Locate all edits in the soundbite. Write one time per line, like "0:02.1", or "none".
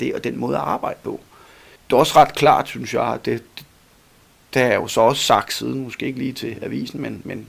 0:01.8